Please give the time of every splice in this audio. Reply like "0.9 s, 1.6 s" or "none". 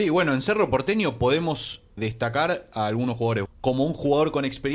2.0 s, 3.5 s